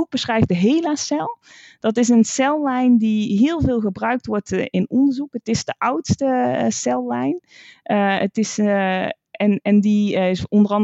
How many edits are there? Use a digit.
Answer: 0